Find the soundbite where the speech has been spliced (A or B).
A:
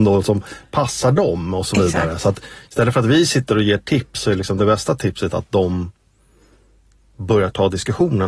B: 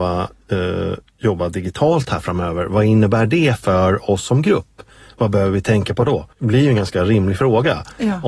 B